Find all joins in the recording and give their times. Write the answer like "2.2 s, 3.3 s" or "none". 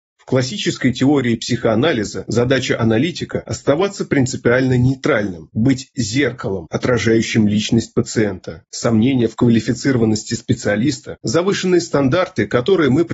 8.7 s, 11.2 s